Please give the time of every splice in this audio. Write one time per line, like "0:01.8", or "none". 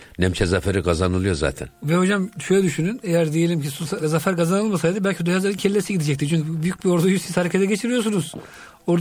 0:04.0

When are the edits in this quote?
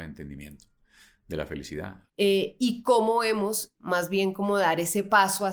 0:02.1
0:03.7

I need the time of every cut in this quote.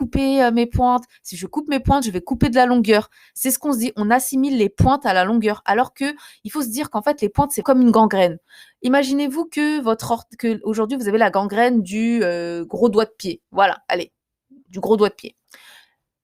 0:07.6

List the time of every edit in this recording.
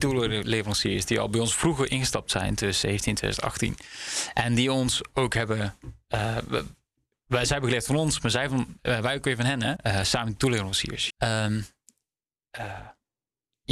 0:09.8
0:11.1

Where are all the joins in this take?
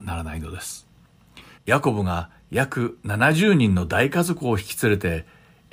0:01.6

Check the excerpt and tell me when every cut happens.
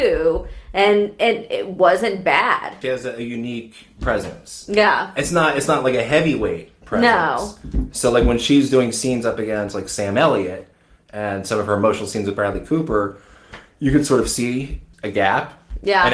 0:02.8

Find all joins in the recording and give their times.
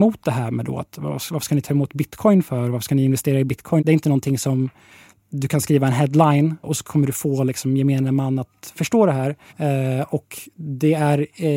0:03.8
0:06.6
0:09.5

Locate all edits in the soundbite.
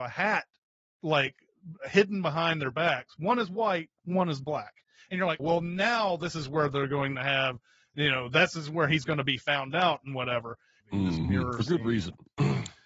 0:05.4
0:10.8

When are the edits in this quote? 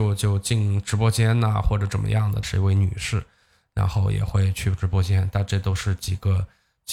0:02.4

